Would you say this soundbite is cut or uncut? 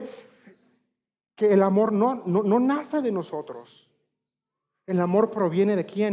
uncut